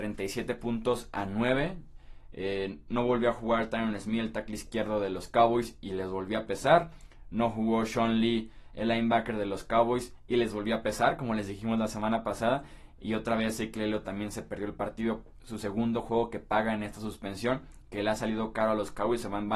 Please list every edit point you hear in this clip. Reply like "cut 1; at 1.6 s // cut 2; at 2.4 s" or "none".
none